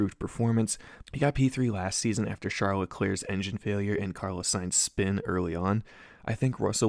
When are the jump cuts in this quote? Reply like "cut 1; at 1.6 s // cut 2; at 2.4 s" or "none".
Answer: cut 1; at 1.0 s